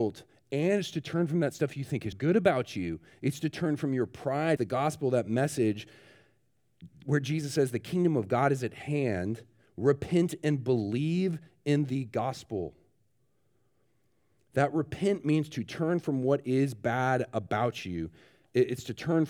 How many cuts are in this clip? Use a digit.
2